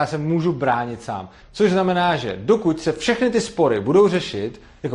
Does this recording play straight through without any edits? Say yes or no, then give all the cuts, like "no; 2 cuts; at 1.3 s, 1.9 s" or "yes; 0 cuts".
no; 1 cut; at 1.4 s